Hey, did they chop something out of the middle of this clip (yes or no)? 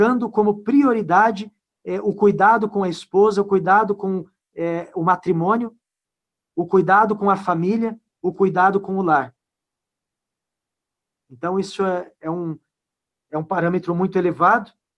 no